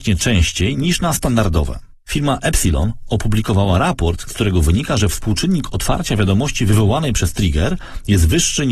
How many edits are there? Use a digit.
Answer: 1